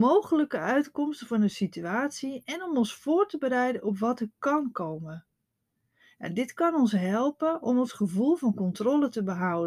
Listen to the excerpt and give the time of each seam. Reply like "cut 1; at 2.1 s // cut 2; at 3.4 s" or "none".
none